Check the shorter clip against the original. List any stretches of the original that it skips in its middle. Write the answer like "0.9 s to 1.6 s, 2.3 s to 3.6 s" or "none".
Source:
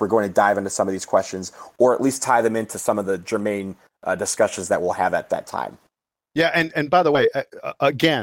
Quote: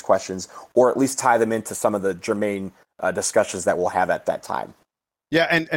none